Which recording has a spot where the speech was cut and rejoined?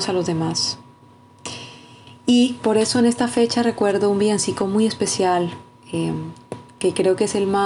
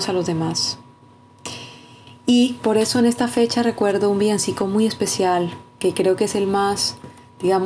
second; 1 cut; at 5.8 s

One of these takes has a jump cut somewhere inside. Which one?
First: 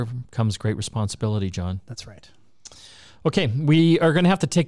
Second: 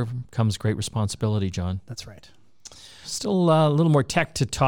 second; 1 cut; at 3.0 s

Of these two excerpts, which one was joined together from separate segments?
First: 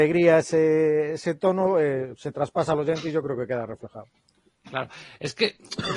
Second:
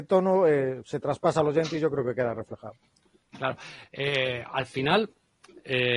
second; 1 cut; at 3.8 s

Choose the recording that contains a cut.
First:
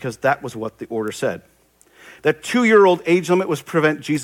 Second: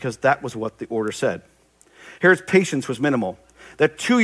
first; 1 cut; at 2.2 s

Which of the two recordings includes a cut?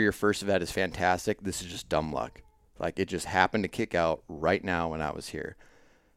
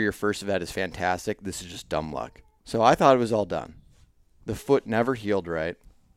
second; 1 cut; at 2.6 s

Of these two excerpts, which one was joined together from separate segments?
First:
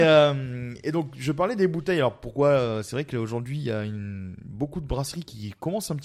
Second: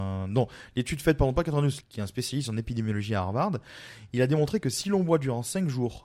second; 1 cut; at 1.8 s

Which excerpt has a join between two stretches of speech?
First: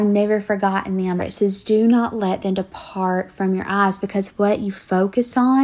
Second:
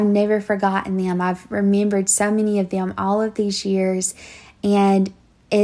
first; 1 cut; at 1.2 s

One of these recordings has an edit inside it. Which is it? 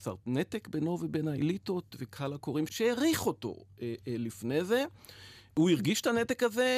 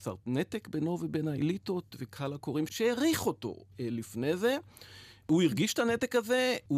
second; 1 cut; at 3.7 s

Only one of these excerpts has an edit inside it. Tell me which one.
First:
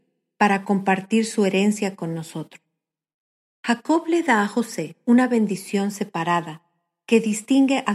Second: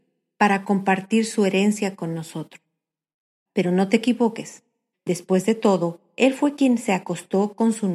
second; 2 cuts; at 3.5 s, 4.9 s

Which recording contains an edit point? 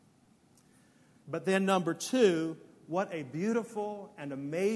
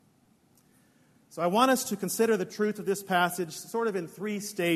first; 1 cut; at 1.2 s

